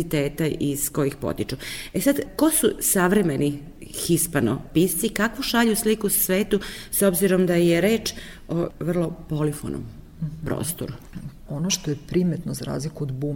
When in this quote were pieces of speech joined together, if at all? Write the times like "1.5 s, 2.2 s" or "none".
11.5 s